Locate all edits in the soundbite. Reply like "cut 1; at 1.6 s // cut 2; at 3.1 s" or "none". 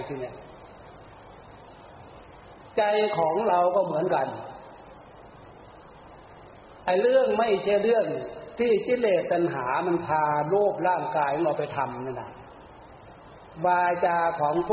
none